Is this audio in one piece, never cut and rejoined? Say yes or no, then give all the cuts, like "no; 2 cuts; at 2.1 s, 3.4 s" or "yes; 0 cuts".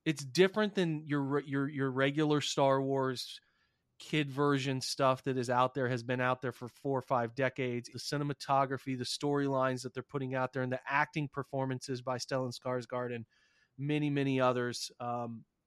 no; 1 cut; at 7.9 s